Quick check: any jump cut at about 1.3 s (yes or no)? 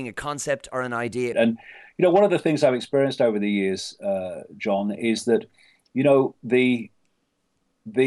yes